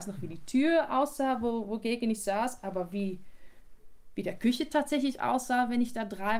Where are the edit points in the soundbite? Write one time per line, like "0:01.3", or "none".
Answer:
none